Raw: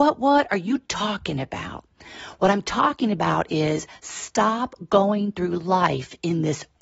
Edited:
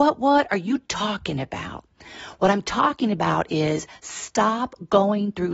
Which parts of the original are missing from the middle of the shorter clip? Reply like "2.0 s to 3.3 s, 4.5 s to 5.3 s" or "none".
none